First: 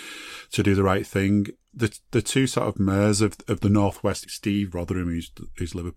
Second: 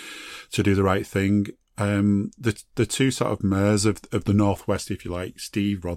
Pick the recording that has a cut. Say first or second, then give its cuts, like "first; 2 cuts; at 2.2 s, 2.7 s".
first; 2 cuts; at 1.7 s, 4.2 s